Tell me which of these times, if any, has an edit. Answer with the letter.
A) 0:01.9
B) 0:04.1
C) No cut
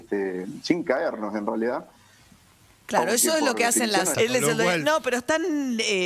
B